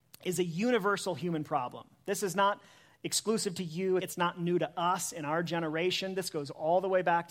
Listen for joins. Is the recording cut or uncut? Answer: cut